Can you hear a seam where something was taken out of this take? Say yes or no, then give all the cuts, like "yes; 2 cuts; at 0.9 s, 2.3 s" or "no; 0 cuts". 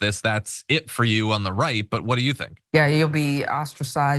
yes; 1 cut; at 2.7 s